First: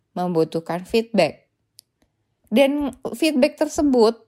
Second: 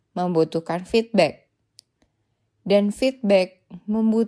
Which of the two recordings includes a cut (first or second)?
first